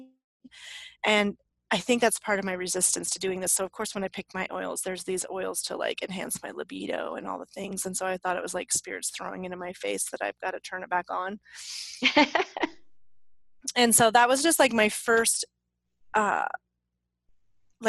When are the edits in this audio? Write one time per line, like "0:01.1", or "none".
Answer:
none